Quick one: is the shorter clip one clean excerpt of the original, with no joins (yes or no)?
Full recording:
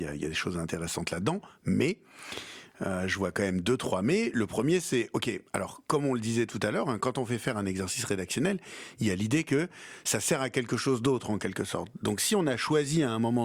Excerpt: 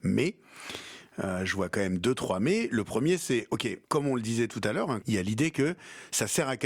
no